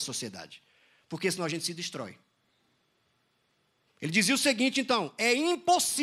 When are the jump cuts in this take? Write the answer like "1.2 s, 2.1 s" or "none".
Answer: 3.9 s